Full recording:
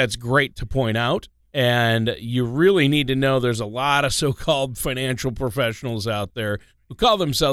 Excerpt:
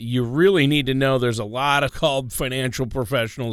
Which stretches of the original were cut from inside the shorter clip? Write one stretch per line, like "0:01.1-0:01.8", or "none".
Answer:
0:04.1-0:04.3